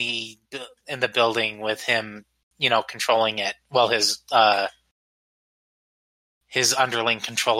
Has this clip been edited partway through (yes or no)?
no